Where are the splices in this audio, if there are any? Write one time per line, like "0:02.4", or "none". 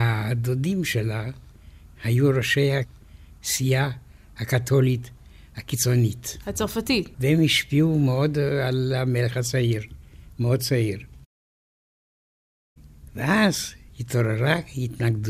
0:07.1